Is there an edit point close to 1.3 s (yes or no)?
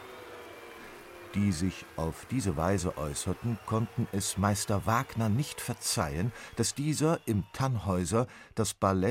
no